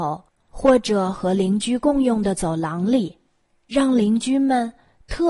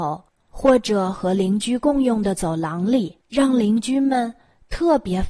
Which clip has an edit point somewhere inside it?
second; 1 cut; at 3.2 s

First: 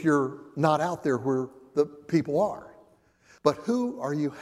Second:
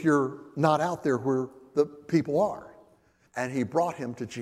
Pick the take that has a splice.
second; 1 cut; at 3.2 s

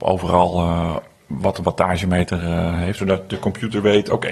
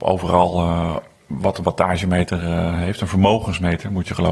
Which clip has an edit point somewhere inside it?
first; 1 cut; at 3.0 s

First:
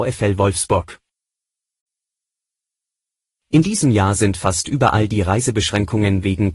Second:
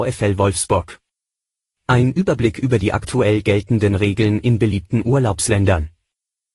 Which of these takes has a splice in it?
second; 1 cut; at 1.7 s

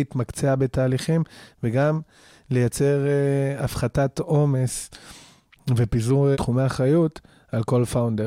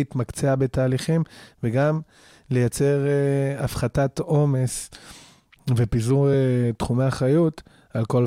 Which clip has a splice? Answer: first; 1 cut; at 6.3 s

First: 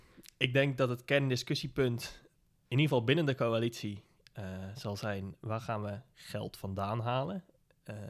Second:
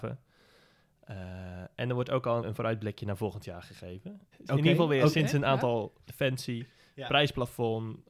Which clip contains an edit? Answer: second; 3 cuts; at 2.4 s, 4.3 s, 6.1 s

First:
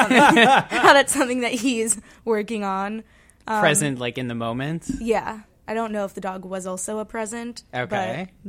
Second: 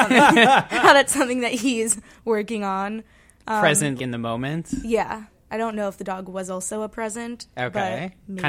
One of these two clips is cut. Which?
second; 1 cut; at 4.0 s

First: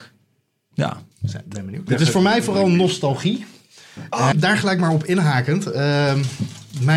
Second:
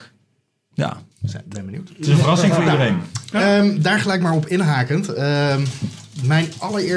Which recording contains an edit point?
first; 2 cuts; at 1.9 s, 4.3 s

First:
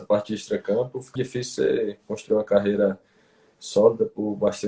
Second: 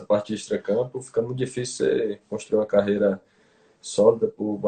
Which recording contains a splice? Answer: first; 1 cut; at 1.2 s

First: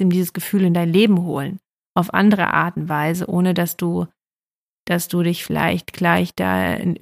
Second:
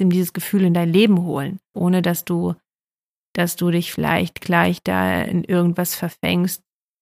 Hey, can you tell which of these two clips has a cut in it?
second; 1 cut; at 1.7 s

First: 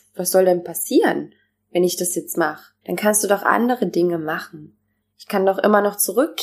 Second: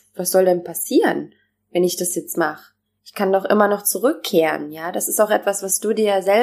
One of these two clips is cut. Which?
first; 2 cuts; at 2.8 s, 5.0 s

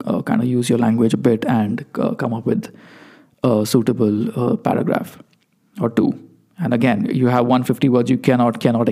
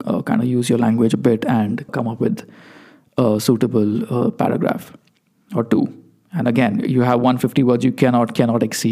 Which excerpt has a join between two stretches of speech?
second; 1 cut; at 1.9 s

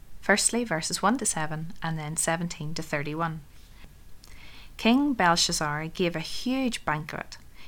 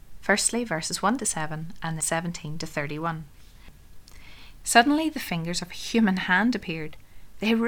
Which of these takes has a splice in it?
second; 2 cuts; at 2.0 s, 4.6 s

